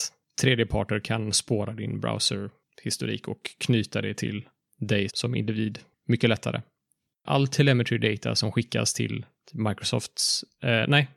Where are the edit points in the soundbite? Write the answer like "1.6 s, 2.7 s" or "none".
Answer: 5.1 s, 7.1 s